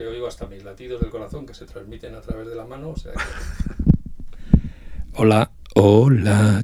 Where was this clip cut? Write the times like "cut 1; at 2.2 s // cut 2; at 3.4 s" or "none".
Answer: none